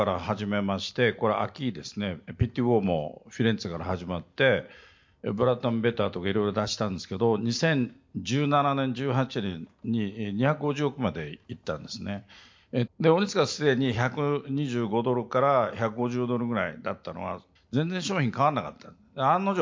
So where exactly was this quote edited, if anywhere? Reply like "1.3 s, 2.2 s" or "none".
12.9 s, 17.6 s